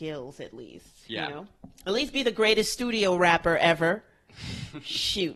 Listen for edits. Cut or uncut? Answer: uncut